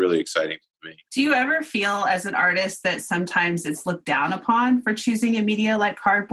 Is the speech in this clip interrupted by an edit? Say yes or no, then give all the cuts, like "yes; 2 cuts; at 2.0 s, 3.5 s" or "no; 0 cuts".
yes; 1 cut; at 1.0 s